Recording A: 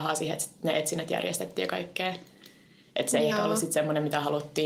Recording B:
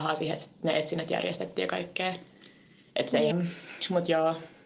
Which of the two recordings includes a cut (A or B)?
B